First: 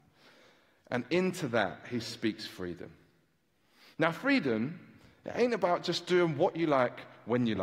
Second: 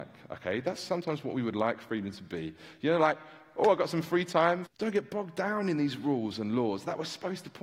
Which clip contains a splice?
second; 1 cut; at 4.7 s

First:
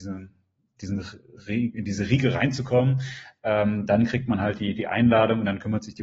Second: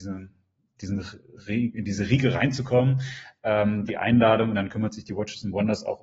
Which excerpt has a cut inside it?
second; 1 cut; at 3.9 s

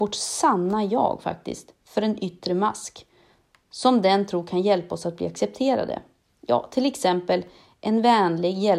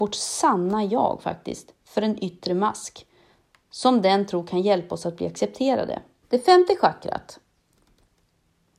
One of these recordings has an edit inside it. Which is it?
second; 1 cut; at 6.2 s

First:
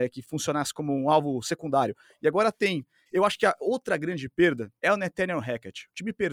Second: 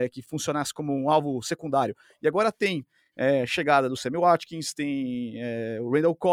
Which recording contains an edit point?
first; 2 cuts; at 3.1 s, 4.8 s

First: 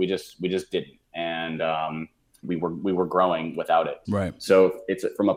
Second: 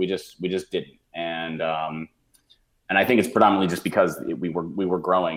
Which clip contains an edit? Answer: first; 2 cuts; at 2.4 s, 4.0 s

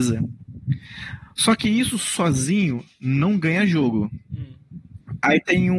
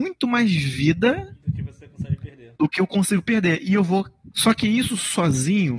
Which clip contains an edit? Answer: second; 2 cuts; at 2.6 s, 4.3 s

